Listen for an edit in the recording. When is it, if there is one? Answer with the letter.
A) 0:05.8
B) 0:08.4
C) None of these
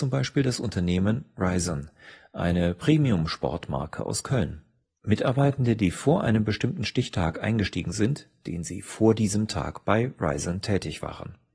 B